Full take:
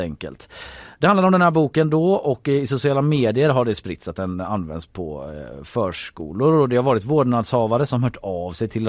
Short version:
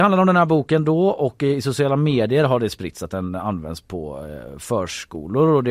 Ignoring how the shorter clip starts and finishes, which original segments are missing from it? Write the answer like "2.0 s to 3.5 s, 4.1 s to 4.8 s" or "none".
none